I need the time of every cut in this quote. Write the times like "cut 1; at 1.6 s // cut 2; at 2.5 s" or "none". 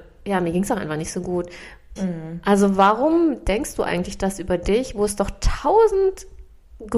cut 1; at 2.0 s

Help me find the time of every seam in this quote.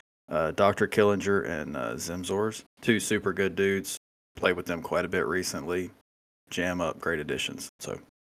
cut 1; at 2.7 s

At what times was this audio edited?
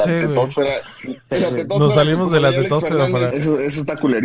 cut 1; at 3.3 s

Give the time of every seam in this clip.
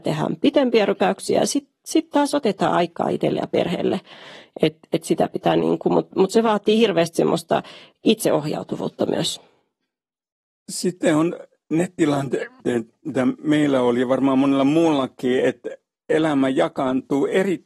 none

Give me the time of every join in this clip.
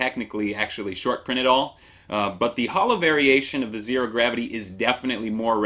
none

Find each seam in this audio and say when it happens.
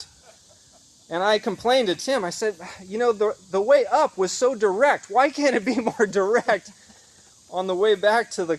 none

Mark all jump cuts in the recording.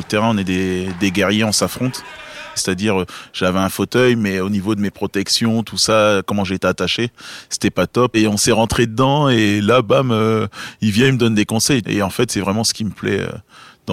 cut 1; at 2.6 s // cut 2; at 8.1 s // cut 3; at 11.8 s

